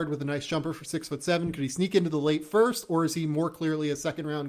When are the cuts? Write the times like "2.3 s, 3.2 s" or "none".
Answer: none